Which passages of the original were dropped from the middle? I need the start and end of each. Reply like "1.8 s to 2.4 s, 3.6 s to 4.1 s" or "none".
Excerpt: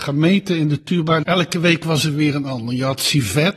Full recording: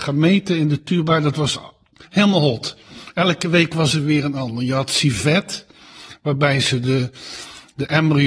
1.2 s to 3.1 s